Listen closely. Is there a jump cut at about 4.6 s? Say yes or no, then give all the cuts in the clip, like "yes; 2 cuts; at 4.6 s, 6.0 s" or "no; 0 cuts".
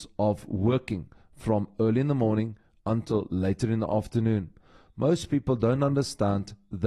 no; 0 cuts